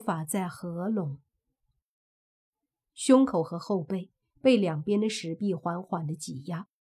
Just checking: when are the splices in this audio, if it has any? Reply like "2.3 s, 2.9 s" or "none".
2.8 s